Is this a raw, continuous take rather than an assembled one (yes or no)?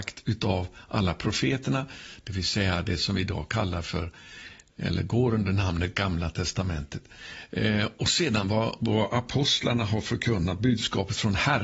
yes